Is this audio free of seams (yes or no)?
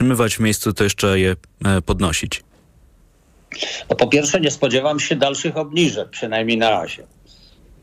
yes